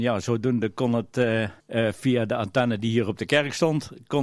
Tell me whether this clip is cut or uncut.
cut